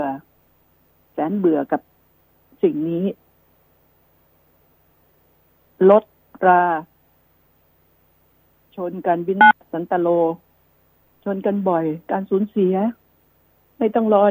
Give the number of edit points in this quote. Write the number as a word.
zero